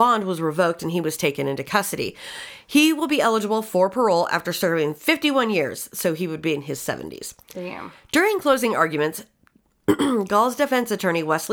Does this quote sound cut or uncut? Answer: uncut